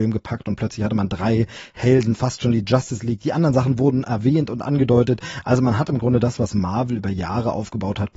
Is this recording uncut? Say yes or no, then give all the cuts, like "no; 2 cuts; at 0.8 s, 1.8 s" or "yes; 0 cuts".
yes; 0 cuts